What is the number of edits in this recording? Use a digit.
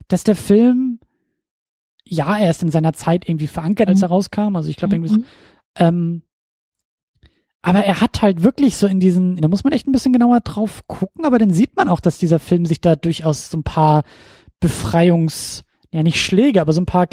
3